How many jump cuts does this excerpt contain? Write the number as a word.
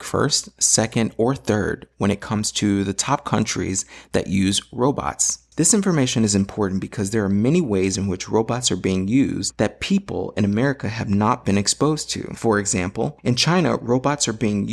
one